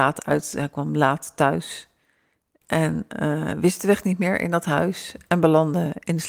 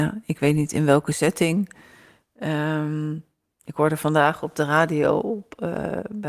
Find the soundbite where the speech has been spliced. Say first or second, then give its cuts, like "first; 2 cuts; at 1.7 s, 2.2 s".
first; 1 cut; at 2.6 s